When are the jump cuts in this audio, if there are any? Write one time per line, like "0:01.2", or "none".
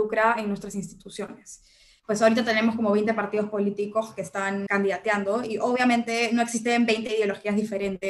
0:02.0
0:04.7